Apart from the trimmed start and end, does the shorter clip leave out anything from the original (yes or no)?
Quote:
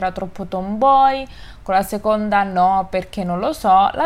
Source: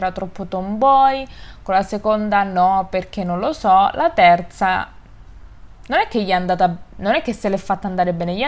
no